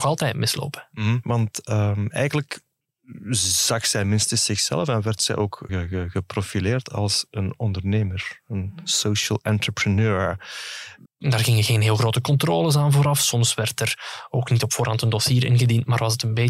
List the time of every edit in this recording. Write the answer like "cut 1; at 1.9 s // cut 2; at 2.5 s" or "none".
cut 1; at 1.2 s // cut 2; at 5.7 s // cut 3; at 11.0 s